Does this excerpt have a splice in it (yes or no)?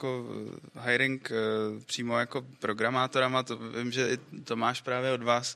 no